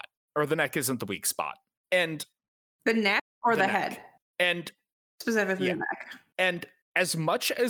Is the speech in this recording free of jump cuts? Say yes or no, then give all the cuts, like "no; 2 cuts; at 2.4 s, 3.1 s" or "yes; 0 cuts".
yes; 0 cuts